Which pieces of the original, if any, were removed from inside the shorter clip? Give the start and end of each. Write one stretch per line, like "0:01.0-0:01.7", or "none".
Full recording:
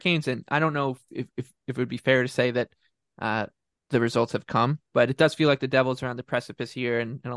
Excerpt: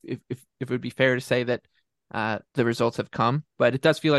0:03.6-0:03.8